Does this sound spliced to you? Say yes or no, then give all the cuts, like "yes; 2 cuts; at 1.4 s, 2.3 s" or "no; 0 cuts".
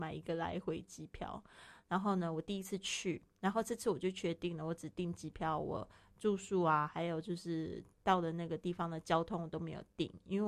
yes; 1 cut; at 1.8 s